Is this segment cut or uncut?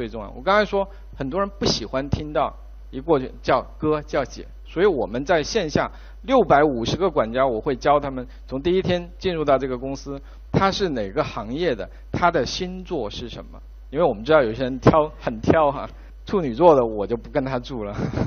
cut